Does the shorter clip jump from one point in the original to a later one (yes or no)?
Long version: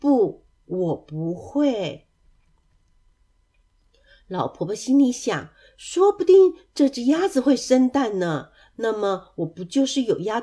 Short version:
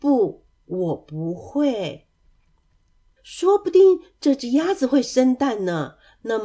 yes